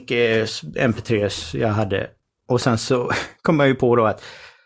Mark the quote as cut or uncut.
cut